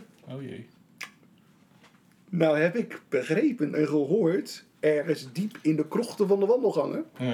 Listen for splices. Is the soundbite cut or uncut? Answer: uncut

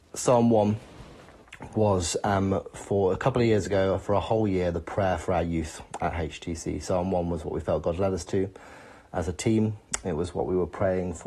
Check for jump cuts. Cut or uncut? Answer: uncut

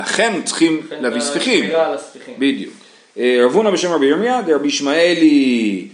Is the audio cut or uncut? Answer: uncut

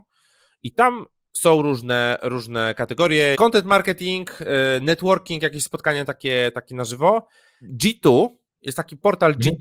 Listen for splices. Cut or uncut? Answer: cut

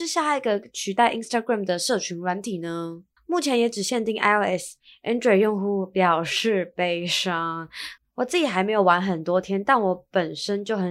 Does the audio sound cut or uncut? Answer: cut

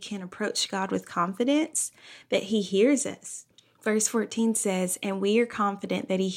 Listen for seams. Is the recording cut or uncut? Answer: cut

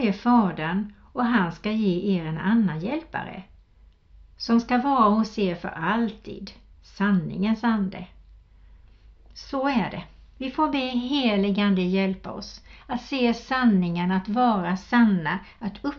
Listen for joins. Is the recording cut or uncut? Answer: uncut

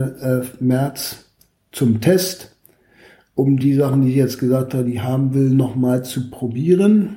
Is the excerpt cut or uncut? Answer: uncut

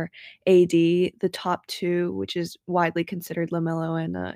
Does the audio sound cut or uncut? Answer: uncut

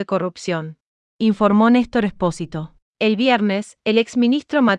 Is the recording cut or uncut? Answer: cut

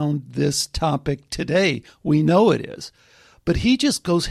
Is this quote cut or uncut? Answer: uncut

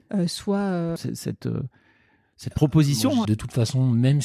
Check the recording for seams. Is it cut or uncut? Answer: cut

